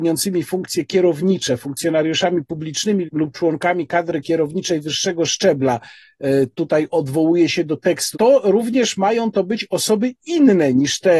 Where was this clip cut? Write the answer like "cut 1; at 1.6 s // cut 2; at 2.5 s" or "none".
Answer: cut 1; at 3.0 s // cut 2; at 8.1 s

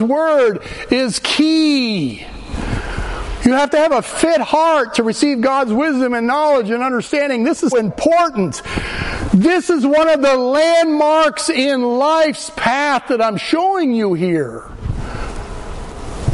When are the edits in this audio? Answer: cut 1; at 7.7 s

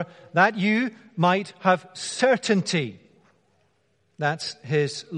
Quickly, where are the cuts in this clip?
none

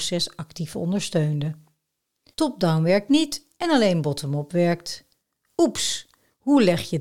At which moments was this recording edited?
cut 1; at 2.3 s

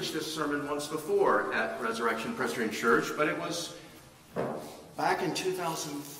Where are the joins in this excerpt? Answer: none

